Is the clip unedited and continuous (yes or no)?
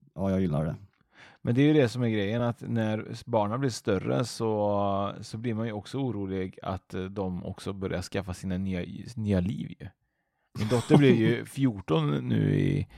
yes